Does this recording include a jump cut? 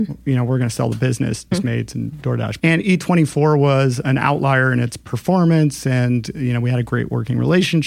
yes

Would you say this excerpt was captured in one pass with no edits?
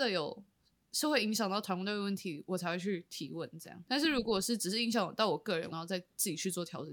no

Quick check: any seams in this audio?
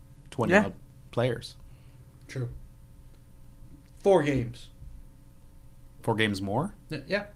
no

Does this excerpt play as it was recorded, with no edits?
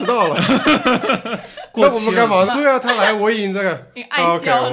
no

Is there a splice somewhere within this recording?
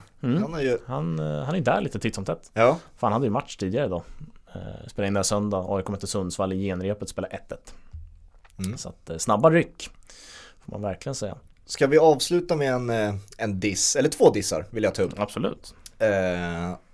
no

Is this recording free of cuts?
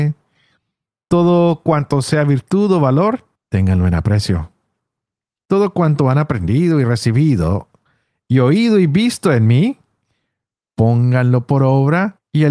yes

